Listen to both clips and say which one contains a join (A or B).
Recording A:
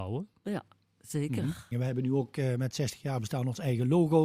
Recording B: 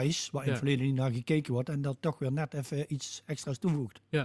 A